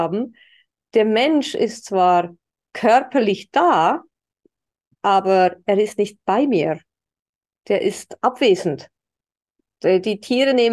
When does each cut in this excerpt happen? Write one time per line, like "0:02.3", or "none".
none